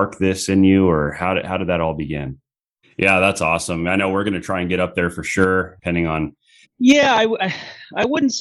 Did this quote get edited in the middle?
yes; 2 cuts; at 2.8 s, 6.6 s

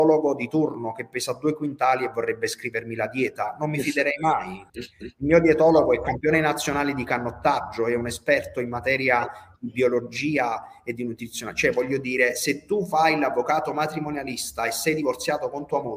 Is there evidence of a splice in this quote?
yes; 1 cut; at 4.7 s

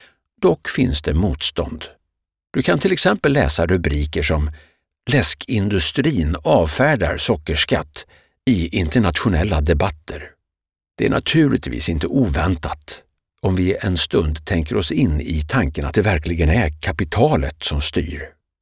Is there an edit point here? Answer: no; 0 cuts

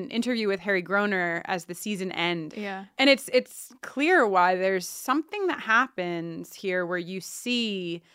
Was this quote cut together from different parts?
yes; 1 cut; at 2.5 s

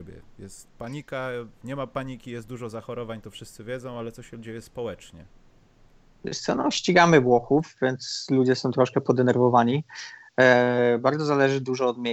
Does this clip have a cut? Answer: no; 0 cuts

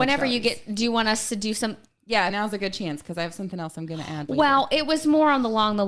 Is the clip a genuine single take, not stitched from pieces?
no; 1 cut; at 2.3 s

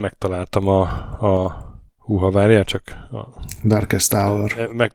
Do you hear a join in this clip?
no; 0 cuts

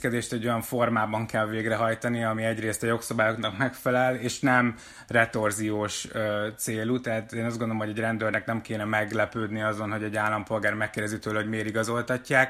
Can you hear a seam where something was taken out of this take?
no; 0 cuts

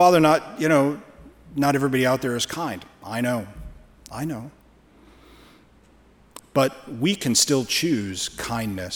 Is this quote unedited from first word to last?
yes; 0 cuts

